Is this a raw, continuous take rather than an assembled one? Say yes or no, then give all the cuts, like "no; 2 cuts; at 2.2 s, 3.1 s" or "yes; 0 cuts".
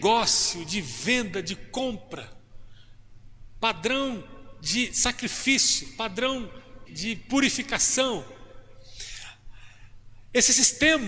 no; 1 cut; at 6.9 s